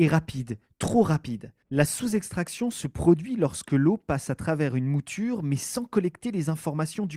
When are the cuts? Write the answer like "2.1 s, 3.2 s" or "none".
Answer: 1.6 s